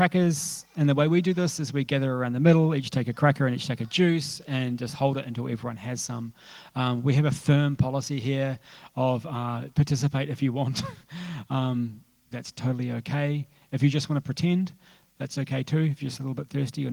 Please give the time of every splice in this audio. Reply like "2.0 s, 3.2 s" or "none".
12.3 s